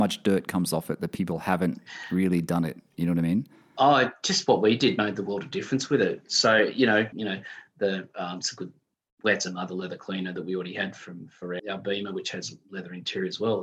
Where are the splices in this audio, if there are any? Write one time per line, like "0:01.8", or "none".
0:07.1
0:11.6